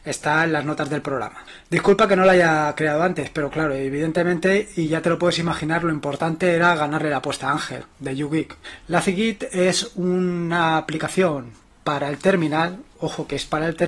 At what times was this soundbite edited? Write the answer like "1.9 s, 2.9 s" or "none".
8.8 s

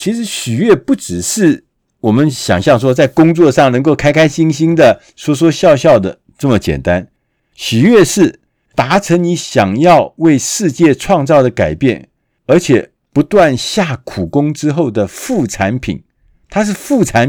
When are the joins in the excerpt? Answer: none

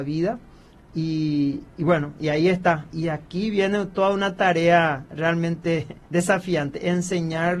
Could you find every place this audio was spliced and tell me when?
2.9 s

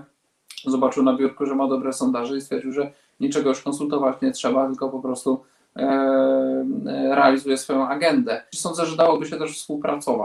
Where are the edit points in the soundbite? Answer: 8.5 s

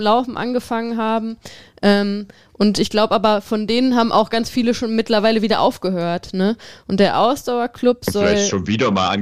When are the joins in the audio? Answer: none

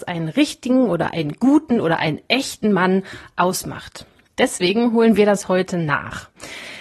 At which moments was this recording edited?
4.3 s

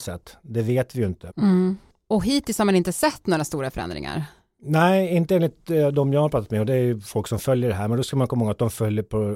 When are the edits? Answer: 1.3 s

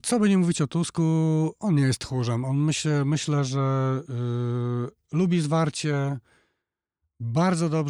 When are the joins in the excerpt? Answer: none

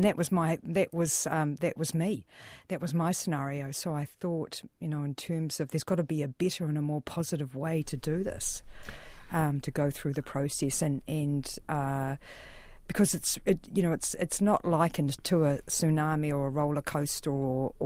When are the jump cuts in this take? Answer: none

